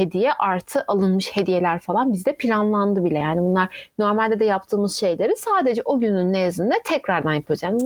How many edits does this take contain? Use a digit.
0